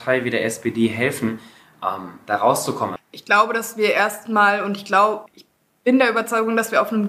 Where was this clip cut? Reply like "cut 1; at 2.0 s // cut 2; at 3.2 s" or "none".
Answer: cut 1; at 3.0 s // cut 2; at 5.3 s